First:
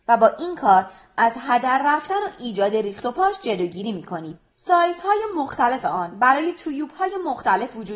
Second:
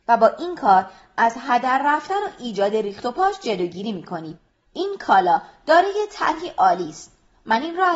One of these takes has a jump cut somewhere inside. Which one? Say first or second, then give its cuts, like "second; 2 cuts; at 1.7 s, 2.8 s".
first; 1 cut; at 4.5 s